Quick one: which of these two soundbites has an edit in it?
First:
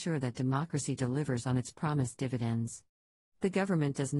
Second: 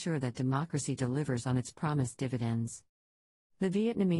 first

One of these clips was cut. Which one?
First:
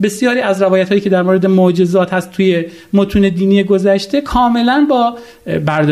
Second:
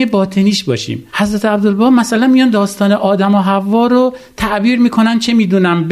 second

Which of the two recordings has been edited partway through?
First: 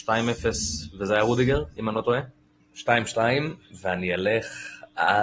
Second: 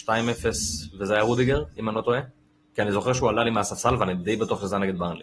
first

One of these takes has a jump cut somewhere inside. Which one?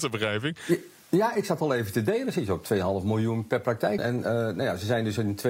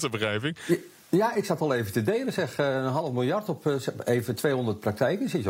first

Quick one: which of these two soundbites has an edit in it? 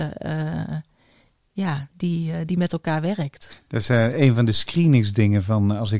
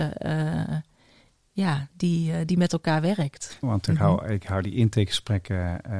second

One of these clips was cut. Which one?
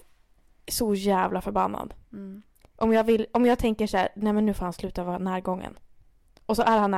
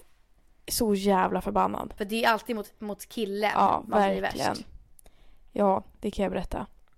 second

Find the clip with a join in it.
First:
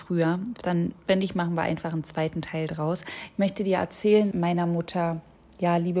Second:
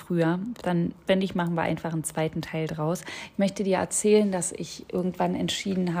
first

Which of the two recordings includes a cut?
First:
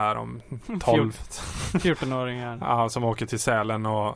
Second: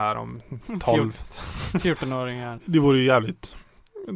second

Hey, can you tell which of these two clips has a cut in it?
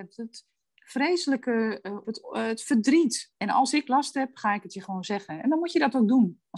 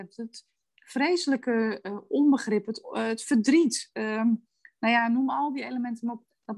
first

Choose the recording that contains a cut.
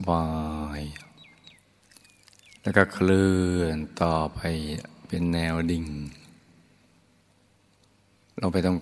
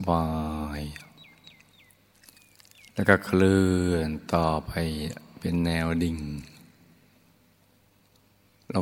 first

